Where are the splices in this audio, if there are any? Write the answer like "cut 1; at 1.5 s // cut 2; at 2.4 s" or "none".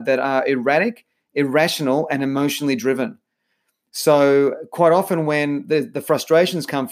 none